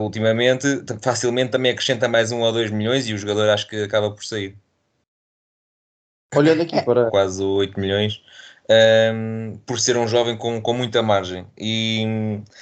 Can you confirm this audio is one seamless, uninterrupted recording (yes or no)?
no